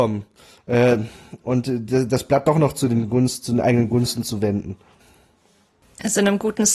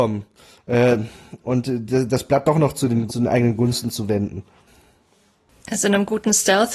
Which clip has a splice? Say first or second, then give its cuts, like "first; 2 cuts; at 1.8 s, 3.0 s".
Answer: second; 1 cut; at 3.1 s